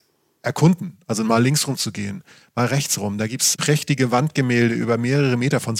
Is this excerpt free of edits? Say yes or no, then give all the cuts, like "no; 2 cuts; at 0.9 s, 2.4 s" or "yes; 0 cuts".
no; 1 cut; at 3.6 s